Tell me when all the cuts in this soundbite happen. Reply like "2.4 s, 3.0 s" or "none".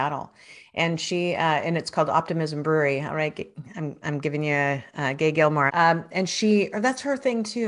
5.7 s